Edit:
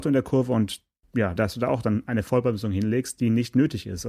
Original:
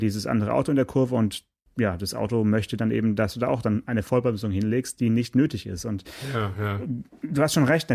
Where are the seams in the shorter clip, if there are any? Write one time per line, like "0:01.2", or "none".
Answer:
0:01.4